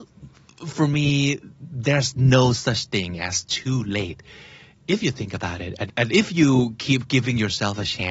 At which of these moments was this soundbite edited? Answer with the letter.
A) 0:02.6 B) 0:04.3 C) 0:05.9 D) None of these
C